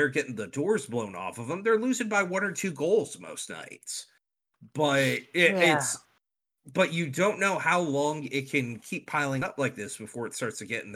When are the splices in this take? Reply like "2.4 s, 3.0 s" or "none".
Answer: none